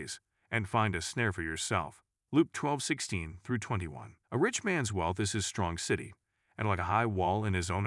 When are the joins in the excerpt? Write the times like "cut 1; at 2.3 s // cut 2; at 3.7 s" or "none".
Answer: cut 1; at 2.3 s // cut 2; at 4.2 s